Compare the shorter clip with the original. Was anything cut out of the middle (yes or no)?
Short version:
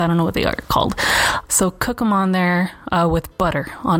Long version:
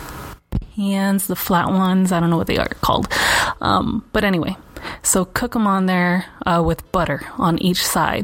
yes